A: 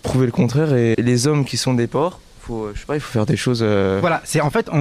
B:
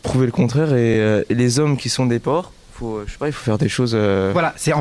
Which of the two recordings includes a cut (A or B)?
A